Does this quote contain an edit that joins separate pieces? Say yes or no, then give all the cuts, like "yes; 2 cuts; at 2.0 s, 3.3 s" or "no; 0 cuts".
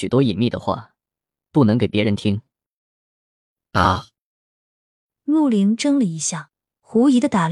no; 0 cuts